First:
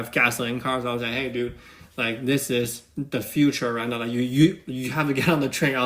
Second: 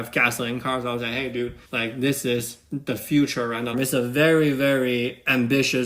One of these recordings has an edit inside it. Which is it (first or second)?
second